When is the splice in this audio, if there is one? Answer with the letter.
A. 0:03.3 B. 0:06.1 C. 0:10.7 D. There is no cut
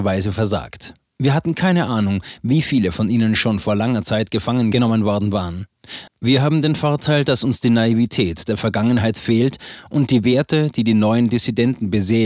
B